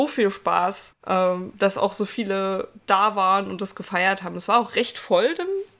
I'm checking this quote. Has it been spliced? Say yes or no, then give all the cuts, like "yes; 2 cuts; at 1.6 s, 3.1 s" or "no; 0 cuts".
yes; 1 cut; at 0.9 s